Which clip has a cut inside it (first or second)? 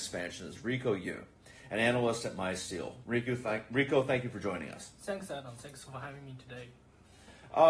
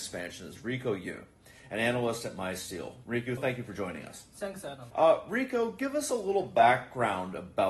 second